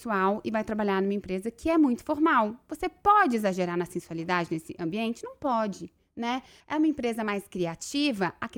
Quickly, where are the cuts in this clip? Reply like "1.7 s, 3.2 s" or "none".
6.6 s